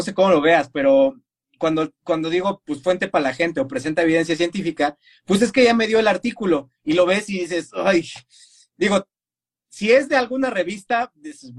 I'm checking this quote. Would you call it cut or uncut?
uncut